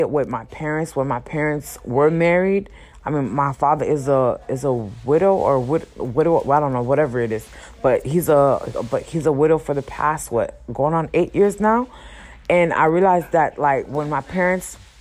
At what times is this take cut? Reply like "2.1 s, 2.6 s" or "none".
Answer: none